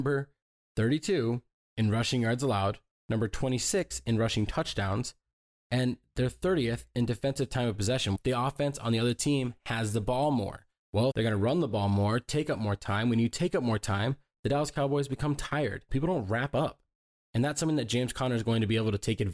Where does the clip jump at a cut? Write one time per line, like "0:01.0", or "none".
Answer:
0:08.2
0:11.1
0:15.9